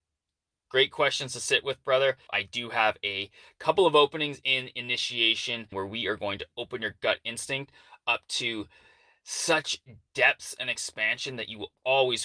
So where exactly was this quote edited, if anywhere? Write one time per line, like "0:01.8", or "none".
0:02.3
0:05.7